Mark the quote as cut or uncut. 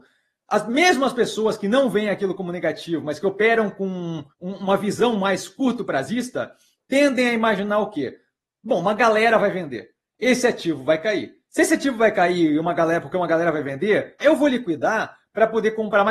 cut